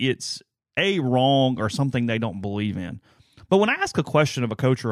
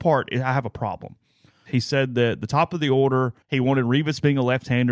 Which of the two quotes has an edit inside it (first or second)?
second